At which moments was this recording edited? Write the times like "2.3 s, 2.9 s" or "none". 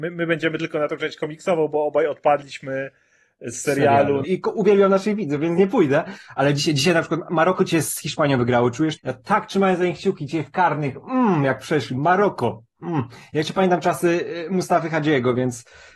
4.2 s, 9.0 s